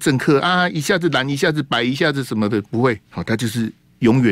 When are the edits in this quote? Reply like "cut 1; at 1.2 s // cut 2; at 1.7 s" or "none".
cut 1; at 3.0 s